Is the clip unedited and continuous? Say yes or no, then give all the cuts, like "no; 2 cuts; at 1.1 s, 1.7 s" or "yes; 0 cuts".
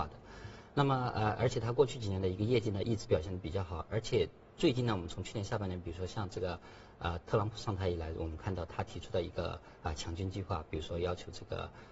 yes; 0 cuts